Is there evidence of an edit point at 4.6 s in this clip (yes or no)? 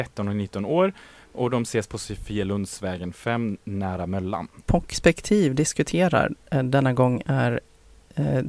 yes